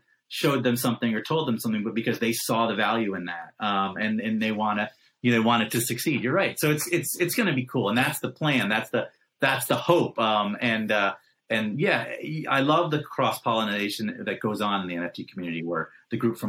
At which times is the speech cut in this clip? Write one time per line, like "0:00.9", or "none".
none